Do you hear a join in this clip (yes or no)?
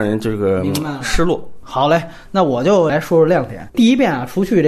yes